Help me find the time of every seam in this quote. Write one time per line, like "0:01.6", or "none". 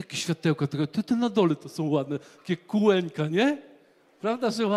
none